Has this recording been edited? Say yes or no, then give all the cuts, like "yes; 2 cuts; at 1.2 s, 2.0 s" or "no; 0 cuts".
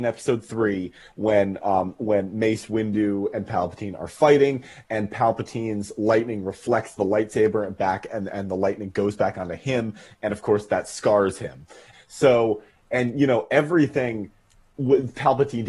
yes; 1 cut; at 11.9 s